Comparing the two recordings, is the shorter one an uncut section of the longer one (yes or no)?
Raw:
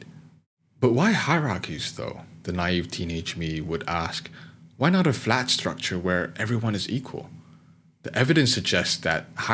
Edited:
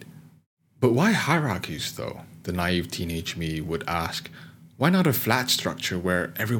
yes